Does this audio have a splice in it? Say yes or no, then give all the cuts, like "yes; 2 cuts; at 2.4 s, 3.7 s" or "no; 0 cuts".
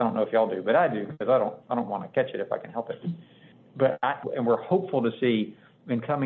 yes; 1 cut; at 4.2 s